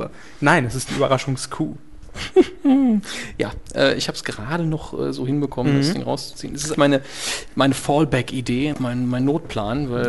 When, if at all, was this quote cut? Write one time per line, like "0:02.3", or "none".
0:06.7
0:08.7